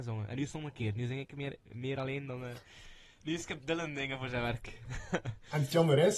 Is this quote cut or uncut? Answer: uncut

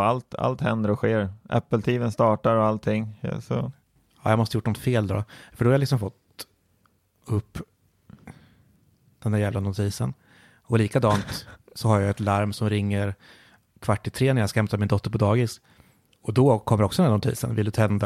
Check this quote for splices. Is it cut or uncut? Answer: uncut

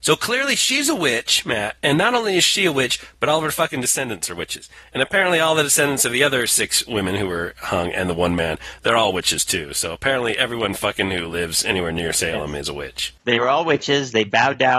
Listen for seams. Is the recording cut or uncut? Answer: cut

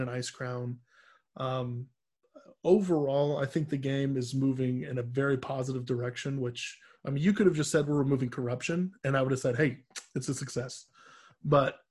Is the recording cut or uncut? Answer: uncut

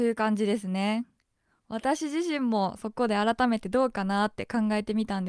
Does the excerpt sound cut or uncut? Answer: uncut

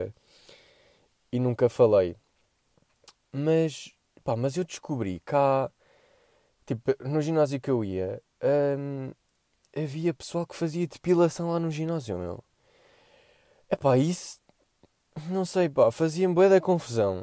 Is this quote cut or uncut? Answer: uncut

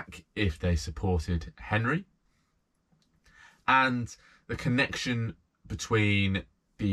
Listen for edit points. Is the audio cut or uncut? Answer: uncut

